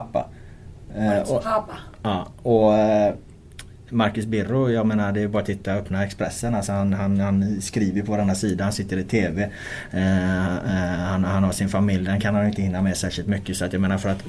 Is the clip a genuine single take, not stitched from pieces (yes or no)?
yes